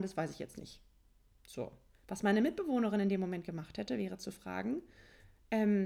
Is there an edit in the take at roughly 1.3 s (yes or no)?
no